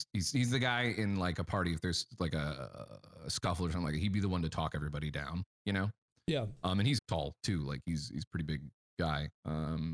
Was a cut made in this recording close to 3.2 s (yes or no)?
no